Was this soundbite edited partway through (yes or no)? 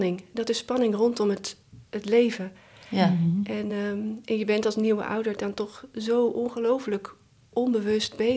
no